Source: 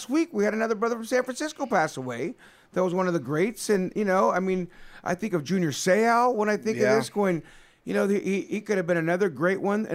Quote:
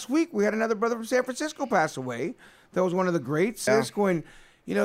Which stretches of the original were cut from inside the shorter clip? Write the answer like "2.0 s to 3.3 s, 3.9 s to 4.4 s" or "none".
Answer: 3.7 s to 6.9 s